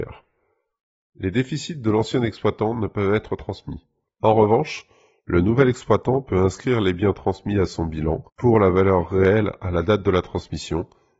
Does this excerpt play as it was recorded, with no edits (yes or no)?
no